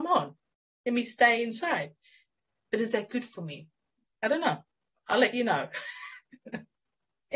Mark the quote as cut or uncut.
uncut